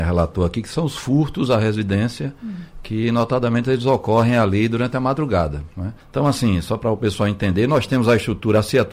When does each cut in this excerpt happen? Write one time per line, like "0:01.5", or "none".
0:06.0